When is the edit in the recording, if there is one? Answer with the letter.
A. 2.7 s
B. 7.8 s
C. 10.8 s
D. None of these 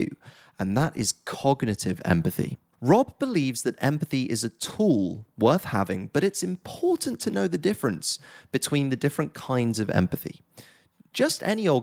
A